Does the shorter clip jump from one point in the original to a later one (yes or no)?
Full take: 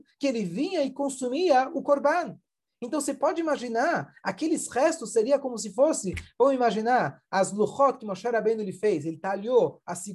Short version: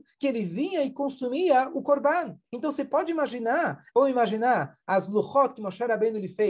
yes